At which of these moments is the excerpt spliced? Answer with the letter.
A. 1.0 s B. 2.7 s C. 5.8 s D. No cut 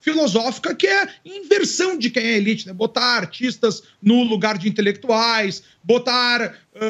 D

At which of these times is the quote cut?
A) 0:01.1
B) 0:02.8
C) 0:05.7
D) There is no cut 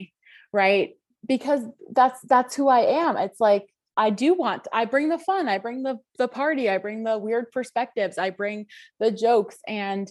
A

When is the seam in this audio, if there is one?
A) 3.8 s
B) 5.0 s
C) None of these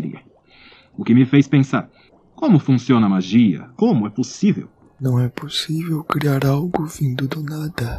A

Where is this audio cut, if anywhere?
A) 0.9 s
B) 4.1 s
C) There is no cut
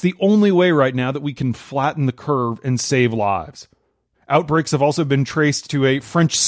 B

